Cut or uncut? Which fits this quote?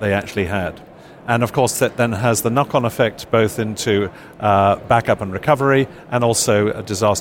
uncut